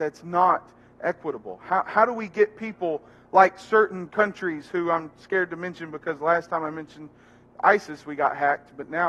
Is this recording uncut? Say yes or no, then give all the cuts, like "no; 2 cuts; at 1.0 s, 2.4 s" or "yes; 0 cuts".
yes; 0 cuts